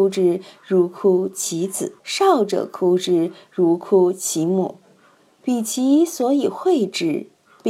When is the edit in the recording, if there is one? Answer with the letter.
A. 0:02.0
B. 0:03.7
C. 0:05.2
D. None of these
A